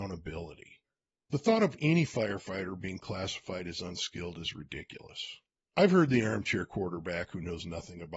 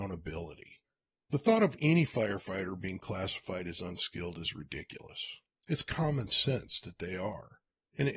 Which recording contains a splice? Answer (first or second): first